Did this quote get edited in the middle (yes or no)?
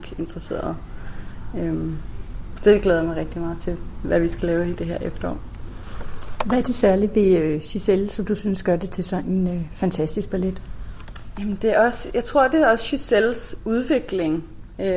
no